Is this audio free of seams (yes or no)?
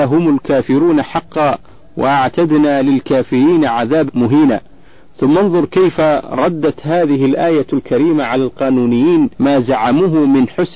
no